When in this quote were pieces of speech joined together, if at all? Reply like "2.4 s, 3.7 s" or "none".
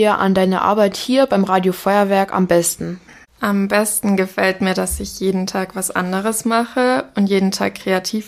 none